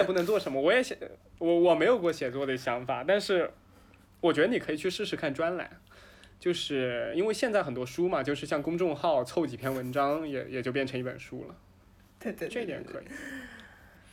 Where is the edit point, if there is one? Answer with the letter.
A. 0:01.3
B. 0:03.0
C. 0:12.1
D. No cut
D